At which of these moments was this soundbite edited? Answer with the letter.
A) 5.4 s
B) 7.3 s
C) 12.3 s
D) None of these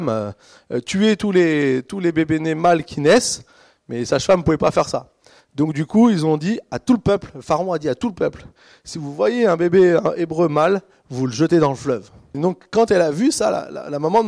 C